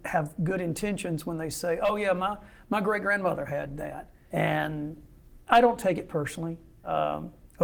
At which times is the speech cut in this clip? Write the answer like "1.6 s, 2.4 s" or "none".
4.3 s